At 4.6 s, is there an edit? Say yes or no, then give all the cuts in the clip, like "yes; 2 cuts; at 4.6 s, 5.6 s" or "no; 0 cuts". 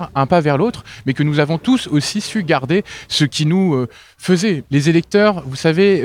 yes; 1 cut; at 4.6 s